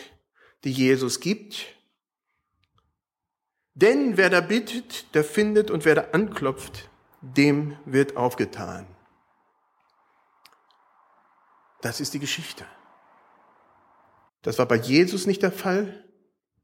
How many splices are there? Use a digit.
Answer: 2